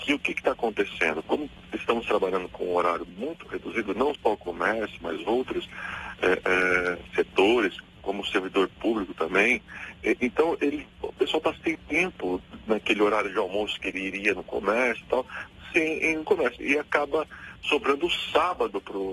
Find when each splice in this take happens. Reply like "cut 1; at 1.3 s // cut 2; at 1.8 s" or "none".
cut 1; at 11.7 s